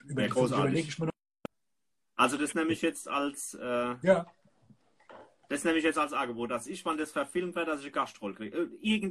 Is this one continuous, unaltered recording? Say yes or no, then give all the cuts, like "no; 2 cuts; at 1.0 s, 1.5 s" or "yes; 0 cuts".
yes; 0 cuts